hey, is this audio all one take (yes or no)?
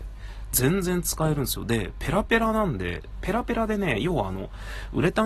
yes